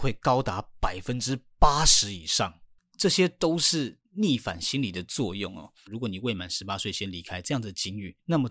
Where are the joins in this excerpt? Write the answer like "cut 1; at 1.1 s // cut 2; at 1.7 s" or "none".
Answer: cut 1; at 2.8 s // cut 2; at 5.9 s